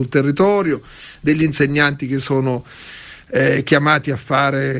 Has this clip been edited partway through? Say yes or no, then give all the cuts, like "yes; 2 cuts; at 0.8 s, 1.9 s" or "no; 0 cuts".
no; 0 cuts